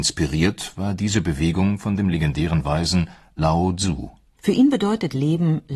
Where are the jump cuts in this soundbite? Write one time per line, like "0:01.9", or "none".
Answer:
0:04.4